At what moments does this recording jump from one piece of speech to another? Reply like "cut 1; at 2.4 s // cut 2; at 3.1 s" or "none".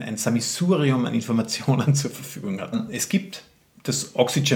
cut 1; at 2.7 s